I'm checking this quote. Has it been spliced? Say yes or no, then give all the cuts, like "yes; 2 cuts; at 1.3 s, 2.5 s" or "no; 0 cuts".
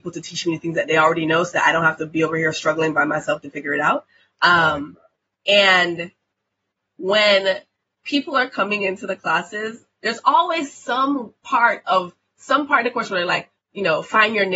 no; 0 cuts